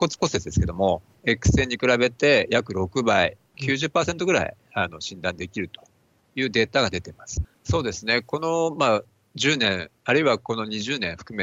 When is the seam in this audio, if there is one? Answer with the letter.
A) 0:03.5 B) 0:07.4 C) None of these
B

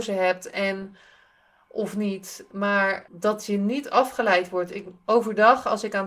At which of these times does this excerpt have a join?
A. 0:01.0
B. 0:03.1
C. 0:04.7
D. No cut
B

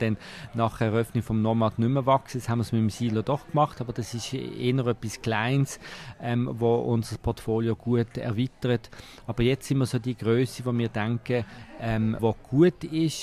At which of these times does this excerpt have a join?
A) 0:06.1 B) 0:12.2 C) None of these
B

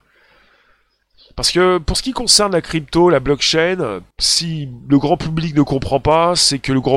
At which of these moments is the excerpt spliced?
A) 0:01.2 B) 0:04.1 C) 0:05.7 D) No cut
B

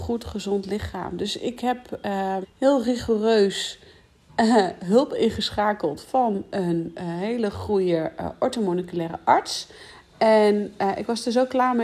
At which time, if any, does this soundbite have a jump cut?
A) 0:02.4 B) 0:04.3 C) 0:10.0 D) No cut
A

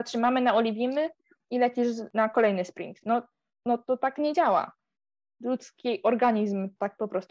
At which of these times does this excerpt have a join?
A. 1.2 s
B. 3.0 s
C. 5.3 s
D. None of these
D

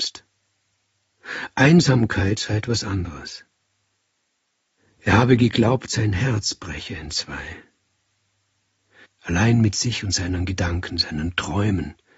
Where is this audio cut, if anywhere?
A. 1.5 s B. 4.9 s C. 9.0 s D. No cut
C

